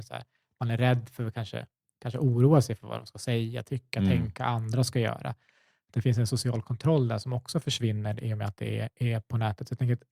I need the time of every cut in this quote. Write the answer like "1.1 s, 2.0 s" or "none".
none